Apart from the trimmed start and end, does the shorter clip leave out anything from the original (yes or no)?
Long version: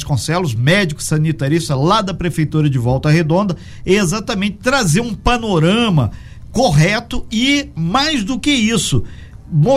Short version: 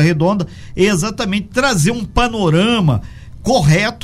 no